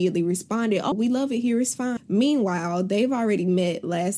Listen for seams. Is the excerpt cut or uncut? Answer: cut